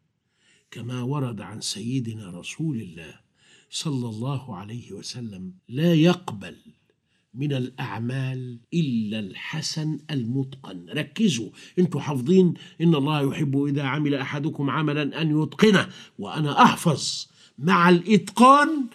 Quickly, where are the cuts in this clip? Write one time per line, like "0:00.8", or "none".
0:05.6
0:08.6